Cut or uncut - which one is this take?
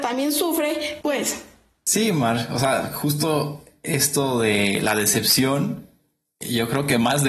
cut